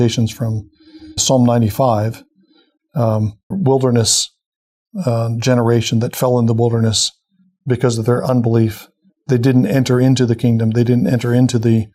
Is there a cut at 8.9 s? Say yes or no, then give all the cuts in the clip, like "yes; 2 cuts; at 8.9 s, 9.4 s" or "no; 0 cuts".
no; 2 cuts; at 1.2 s, 3.5 s